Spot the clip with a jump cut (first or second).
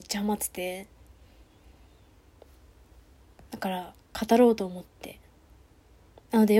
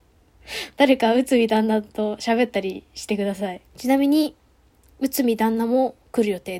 second